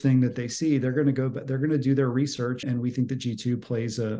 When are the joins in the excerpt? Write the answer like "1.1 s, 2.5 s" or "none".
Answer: 2.6 s

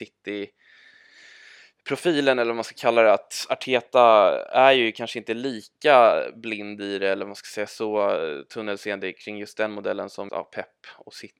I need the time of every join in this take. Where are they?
10.3 s

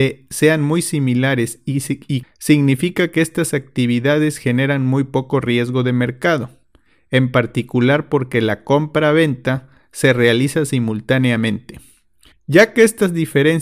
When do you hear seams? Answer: 2.2 s, 12.3 s

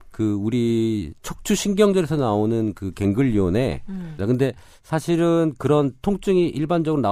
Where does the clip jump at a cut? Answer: 4.2 s

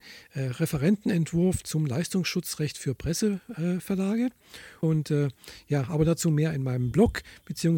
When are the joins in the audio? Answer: 4.8 s

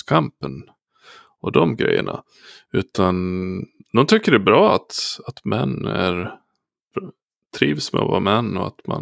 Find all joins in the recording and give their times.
none

